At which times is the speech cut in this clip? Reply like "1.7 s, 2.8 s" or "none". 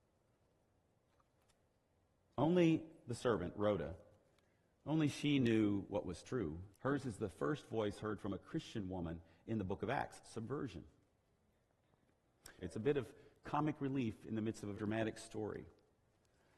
6.7 s, 12.6 s, 14.7 s